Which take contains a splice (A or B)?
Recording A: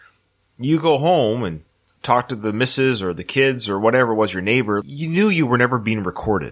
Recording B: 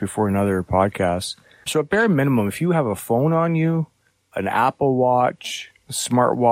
B